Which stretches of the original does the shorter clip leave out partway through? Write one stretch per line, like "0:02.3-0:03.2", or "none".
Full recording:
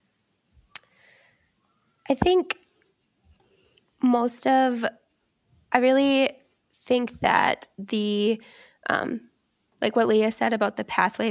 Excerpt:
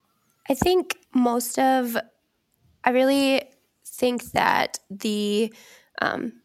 0:02.7-0:03.9